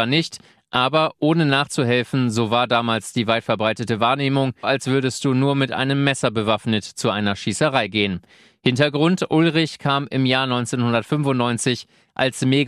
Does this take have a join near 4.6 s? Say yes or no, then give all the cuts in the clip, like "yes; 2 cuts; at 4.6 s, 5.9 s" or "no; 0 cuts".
yes; 1 cut; at 4.6 s